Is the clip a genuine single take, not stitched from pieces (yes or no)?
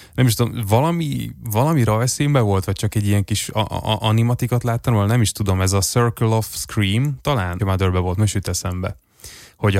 no